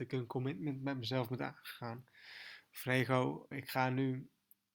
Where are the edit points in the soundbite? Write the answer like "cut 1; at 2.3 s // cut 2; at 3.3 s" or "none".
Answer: cut 1; at 3.5 s